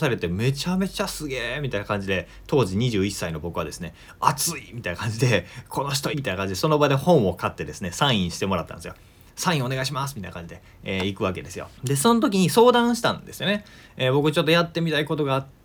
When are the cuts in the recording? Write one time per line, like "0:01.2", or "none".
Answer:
0:06.1
0:11.8